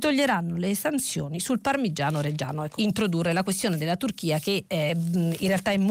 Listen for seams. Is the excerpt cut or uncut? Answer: cut